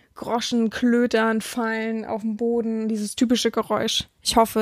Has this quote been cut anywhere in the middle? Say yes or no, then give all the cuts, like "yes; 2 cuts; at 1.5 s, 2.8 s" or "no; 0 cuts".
no; 0 cuts